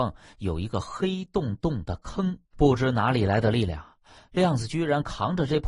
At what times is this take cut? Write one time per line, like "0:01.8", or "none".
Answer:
0:02.5